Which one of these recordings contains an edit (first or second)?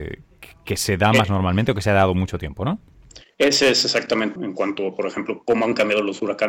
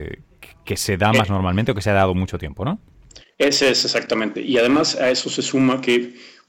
first